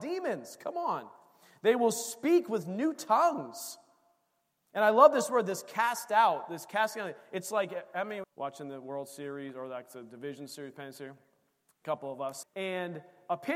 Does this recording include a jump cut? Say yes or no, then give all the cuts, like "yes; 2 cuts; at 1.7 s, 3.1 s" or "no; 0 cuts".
yes; 2 cuts; at 8.2 s, 12.4 s